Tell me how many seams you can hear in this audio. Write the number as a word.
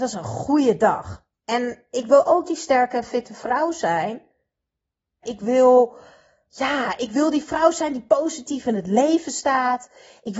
two